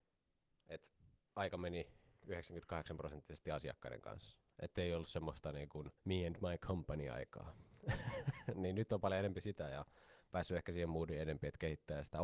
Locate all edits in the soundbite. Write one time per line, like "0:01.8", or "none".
0:06.0